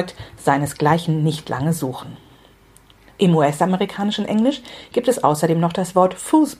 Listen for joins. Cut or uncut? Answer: cut